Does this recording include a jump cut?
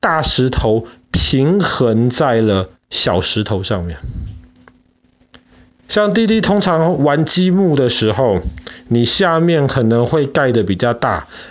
no; 0 cuts

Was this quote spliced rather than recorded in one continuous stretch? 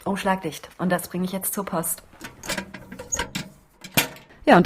no; 0 cuts

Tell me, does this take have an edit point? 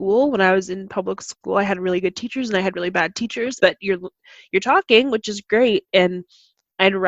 yes; 1 cut; at 3.6 s

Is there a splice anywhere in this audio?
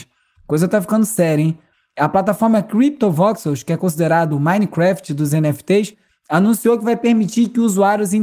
no; 0 cuts

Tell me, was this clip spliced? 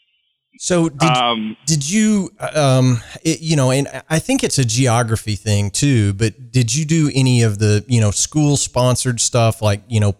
no; 0 cuts

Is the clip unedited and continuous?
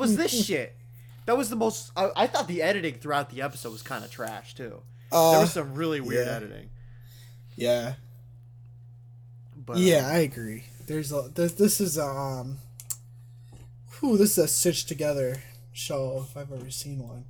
no; 1 cut; at 2.1 s

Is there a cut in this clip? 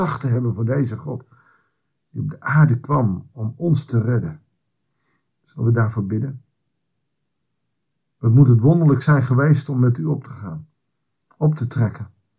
no; 0 cuts

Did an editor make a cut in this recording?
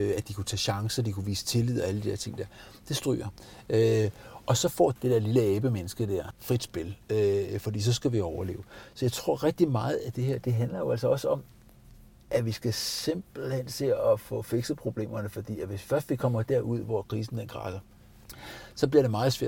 no; 0 cuts

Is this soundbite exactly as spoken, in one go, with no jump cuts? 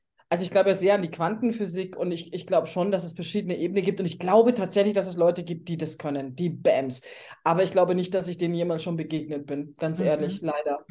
yes; 0 cuts

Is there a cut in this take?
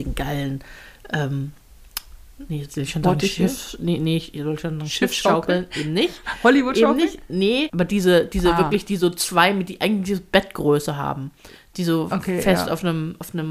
yes; 1 cut; at 7.7 s

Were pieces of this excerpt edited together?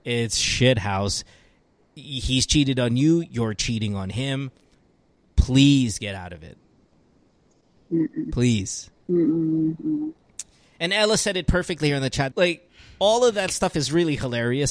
yes; 2 cuts; at 9.0 s, 12.3 s

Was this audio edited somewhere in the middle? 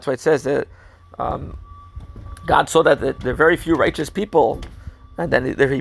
no; 0 cuts

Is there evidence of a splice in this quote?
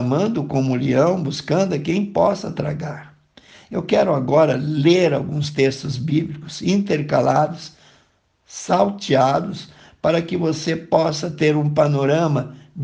no; 0 cuts

